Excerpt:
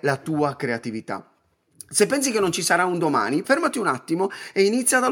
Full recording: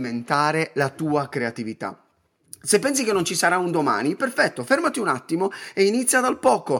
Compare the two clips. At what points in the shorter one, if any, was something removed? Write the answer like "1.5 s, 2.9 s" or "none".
3.4 s